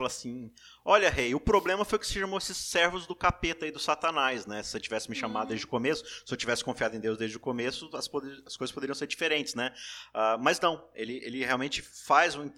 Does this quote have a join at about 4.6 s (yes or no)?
no